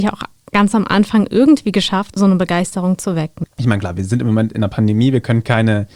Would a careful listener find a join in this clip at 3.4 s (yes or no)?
yes